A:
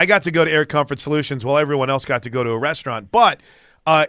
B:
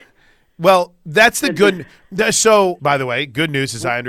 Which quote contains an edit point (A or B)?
B